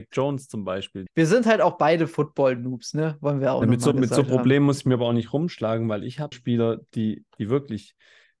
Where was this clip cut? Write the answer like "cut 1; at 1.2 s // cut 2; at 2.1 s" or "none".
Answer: cut 1; at 1.1 s // cut 2; at 6.3 s